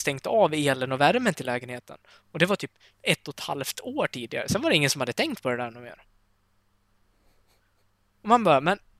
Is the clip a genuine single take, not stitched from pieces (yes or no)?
yes